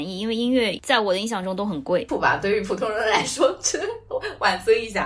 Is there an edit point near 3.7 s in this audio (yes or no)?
no